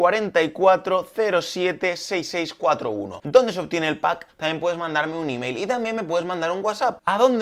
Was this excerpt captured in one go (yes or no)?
no